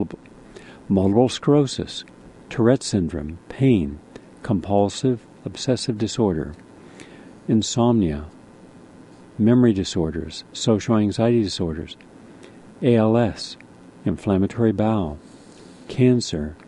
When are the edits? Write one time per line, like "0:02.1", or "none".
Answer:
none